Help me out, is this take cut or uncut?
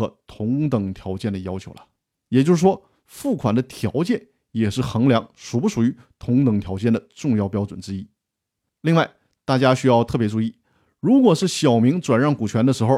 uncut